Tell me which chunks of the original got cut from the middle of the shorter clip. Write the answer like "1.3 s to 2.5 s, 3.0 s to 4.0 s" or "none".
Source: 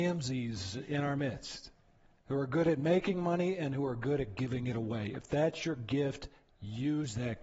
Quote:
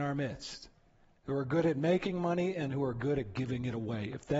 none

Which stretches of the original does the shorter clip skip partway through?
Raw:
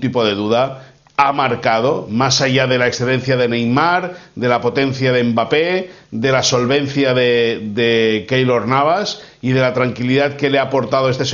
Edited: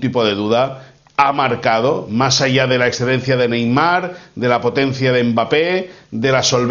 none

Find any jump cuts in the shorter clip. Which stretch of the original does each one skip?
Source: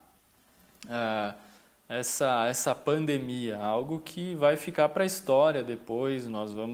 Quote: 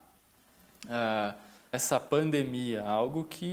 1.7 s to 2.5 s

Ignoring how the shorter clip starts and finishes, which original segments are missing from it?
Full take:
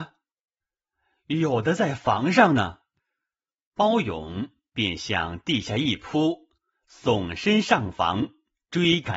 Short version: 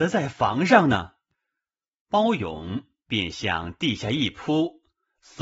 none

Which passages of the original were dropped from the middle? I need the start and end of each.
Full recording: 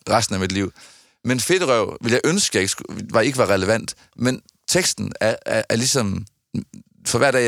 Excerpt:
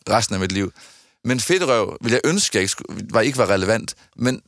none

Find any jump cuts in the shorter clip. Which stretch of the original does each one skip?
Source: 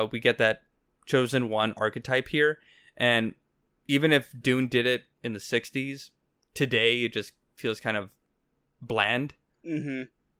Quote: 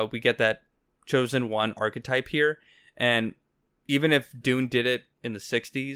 none

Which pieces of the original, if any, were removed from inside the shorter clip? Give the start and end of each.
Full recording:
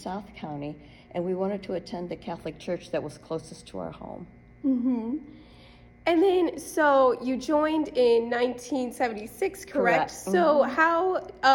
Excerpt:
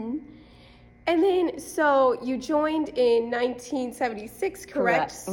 none

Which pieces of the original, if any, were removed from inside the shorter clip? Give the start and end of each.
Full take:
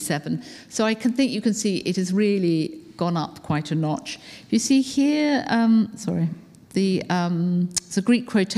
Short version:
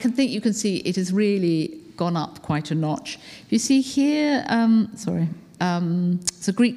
6.6 s to 7.1 s

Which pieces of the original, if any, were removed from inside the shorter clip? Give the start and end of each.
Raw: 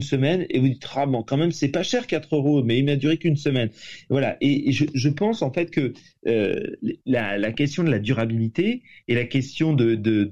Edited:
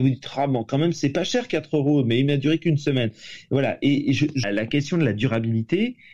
5.0 s to 7.3 s

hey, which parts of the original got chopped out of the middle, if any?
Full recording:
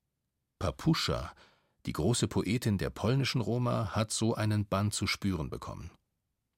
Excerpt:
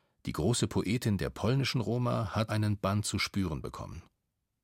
4.1 s to 4.4 s

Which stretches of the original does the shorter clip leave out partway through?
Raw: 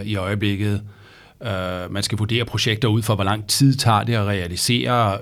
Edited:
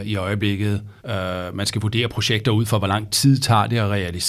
1.0 s to 1.3 s

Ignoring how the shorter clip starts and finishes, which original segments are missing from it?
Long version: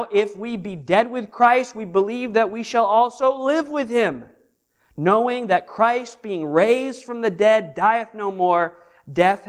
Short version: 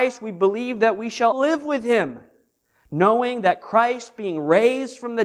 2.9 s to 3.4 s

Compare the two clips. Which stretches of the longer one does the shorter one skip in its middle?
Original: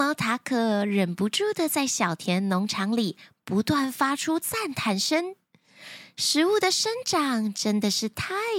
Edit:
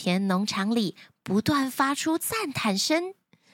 none

